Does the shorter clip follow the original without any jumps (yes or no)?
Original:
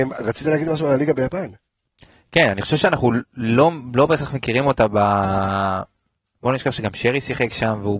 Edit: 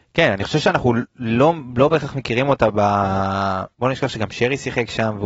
no